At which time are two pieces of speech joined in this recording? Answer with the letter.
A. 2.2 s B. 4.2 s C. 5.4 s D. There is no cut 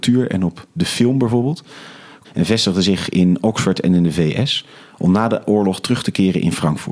A